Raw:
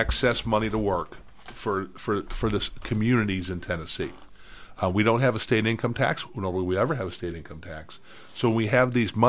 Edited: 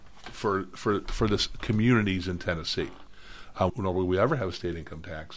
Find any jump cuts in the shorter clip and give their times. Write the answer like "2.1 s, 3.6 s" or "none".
3.7 s